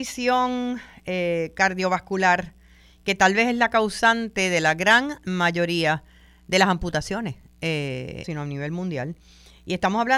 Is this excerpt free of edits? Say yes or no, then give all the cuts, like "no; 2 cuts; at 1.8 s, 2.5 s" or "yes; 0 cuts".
no; 1 cut; at 8.2 s